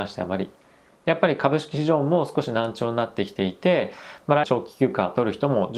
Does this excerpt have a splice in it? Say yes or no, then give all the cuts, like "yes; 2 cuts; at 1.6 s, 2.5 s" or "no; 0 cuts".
yes; 1 cut; at 4.4 s